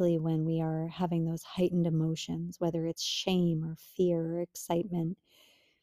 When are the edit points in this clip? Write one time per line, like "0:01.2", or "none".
none

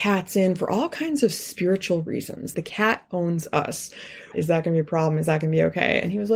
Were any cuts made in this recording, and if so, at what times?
0:02.5
0:04.3

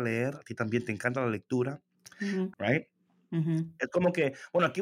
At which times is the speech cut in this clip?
0:02.5

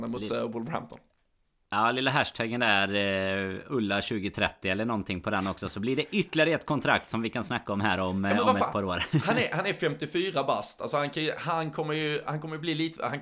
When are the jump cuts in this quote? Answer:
none

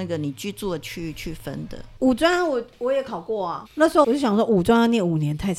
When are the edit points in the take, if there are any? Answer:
0:02.0
0:04.0

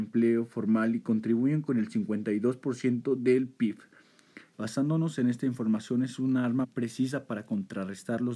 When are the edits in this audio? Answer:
0:04.5
0:06.6

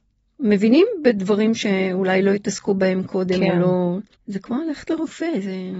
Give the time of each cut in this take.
0:04.1

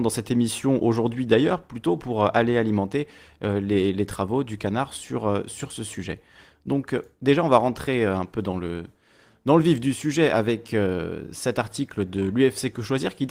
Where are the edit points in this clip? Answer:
none

